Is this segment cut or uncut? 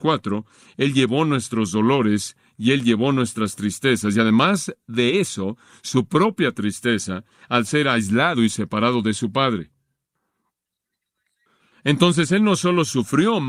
uncut